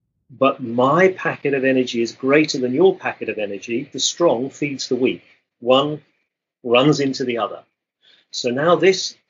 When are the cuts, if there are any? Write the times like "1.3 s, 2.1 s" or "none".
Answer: 3.9 s